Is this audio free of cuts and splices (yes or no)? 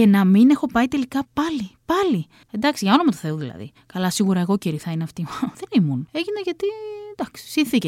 no